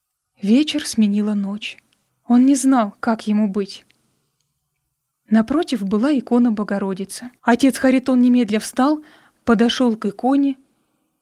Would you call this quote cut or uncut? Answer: cut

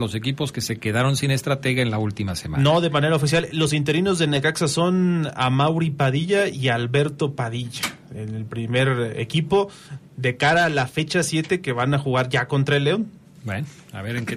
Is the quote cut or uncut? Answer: uncut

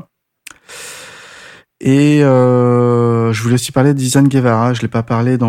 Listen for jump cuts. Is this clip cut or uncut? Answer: uncut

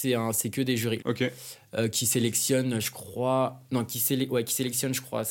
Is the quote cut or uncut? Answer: cut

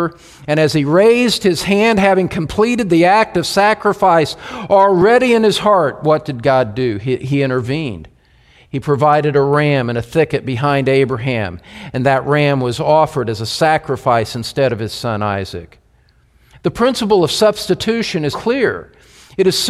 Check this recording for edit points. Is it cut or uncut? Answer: cut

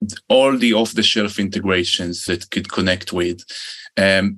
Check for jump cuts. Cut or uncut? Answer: cut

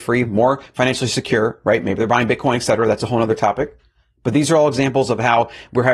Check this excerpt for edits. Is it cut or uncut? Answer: uncut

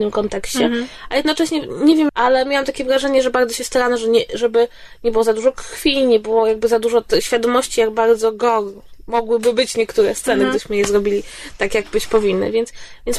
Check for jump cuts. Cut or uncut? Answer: cut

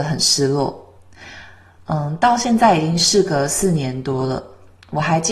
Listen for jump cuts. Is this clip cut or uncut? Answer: uncut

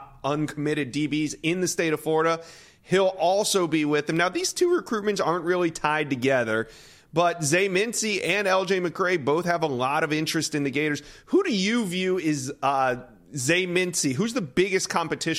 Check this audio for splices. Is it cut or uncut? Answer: uncut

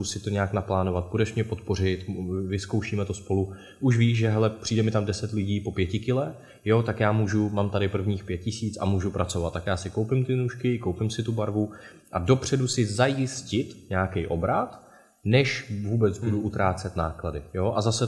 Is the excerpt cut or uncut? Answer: uncut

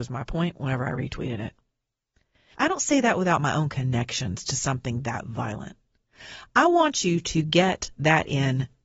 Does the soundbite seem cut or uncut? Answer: cut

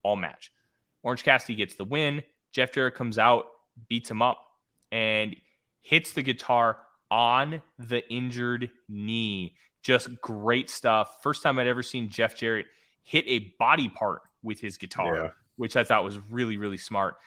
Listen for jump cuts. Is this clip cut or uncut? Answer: uncut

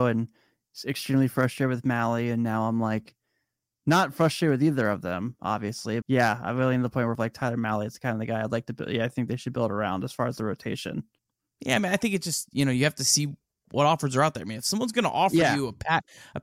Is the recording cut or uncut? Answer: cut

